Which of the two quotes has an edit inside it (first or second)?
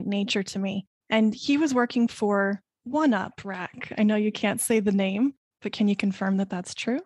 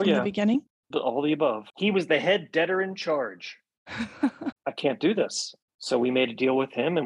second